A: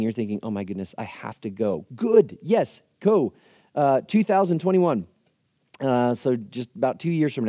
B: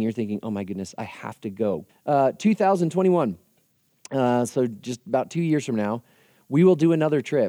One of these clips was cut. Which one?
B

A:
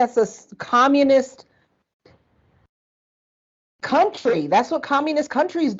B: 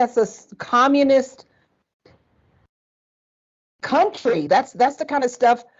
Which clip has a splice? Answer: B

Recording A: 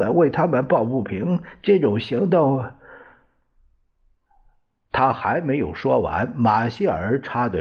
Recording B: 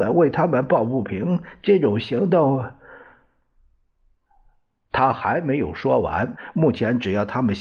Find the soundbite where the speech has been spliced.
B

